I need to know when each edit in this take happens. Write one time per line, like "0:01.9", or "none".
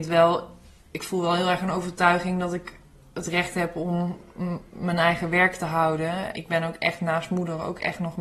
0:06.3